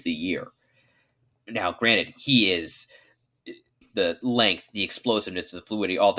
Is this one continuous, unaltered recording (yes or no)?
no